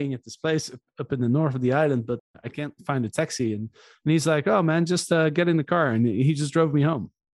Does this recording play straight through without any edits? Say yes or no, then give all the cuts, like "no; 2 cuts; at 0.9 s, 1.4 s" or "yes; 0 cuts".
yes; 0 cuts